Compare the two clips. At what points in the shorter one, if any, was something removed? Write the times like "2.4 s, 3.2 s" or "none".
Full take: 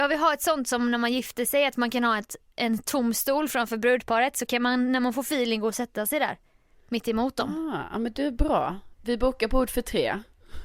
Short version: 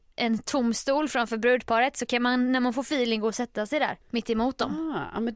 4.0 s